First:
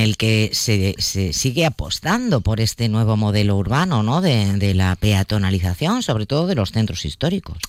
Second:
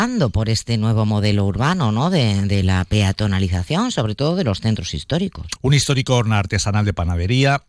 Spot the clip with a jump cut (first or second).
second